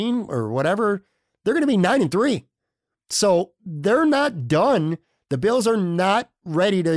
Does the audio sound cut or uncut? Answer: uncut